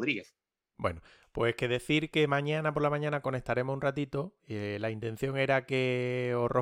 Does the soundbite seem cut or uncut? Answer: uncut